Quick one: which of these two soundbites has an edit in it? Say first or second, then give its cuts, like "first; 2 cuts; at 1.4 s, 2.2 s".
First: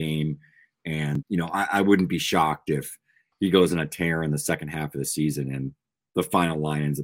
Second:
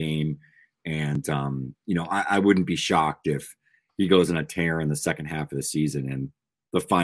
first; 1 cut; at 1.2 s